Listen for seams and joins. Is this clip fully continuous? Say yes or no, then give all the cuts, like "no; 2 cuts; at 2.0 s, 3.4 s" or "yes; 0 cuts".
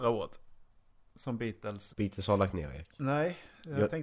no; 1 cut; at 1.9 s